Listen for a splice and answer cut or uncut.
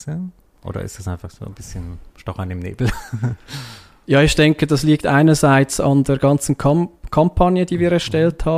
uncut